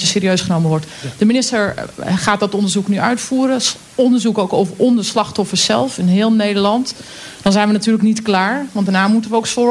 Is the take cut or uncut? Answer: uncut